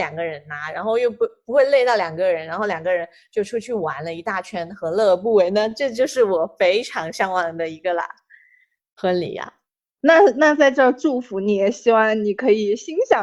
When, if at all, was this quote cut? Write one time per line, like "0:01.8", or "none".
none